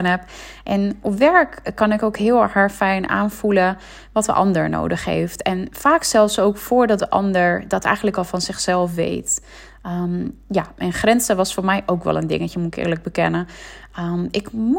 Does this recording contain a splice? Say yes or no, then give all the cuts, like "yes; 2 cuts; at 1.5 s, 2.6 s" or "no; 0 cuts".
no; 0 cuts